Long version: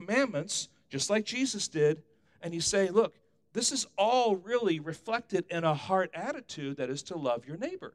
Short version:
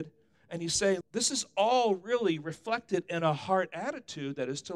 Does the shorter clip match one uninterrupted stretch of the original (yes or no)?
no